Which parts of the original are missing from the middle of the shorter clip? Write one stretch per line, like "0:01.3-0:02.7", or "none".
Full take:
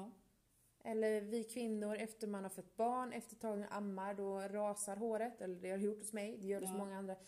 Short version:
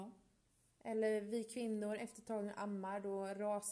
0:02.0-0:03.1